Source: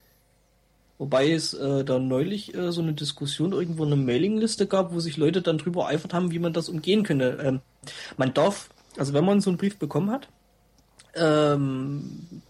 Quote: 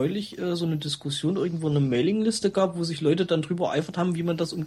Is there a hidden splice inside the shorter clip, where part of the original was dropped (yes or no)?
no